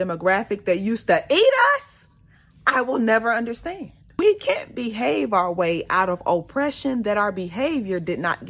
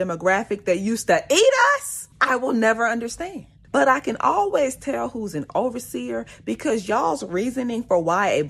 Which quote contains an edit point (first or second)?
second